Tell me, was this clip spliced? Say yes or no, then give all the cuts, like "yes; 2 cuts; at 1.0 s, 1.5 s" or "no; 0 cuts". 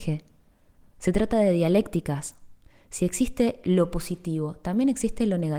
no; 0 cuts